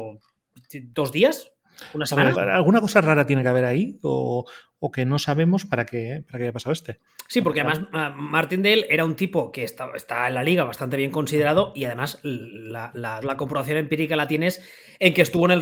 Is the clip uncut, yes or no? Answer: no